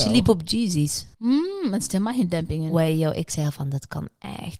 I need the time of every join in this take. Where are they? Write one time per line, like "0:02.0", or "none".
0:01.1